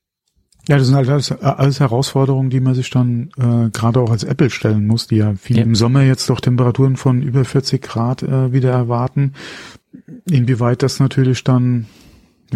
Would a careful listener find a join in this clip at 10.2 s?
no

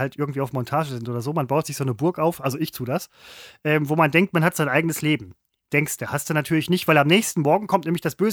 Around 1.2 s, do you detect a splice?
no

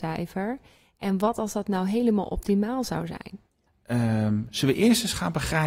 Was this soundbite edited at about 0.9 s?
no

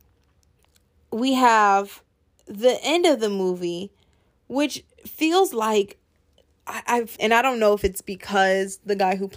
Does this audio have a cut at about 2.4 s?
no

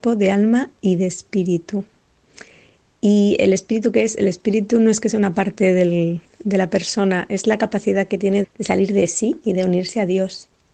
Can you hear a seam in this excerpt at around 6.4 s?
no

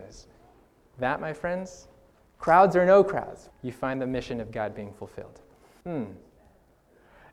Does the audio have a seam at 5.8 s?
yes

